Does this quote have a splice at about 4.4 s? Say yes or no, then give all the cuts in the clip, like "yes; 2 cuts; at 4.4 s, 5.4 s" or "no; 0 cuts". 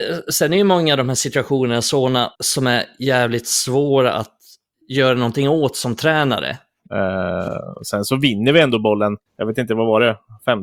no; 3 cuts; at 2.3 s, 6.9 s, 9.3 s